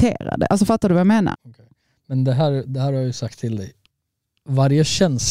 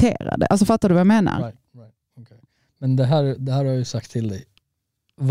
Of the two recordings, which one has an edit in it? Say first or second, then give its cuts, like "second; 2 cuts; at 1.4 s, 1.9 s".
first; 1 cut; at 1.3 s